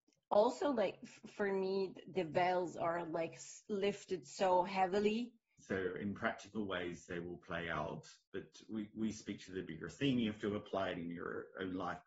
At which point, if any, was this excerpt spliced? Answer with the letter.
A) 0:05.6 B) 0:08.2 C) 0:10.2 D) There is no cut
A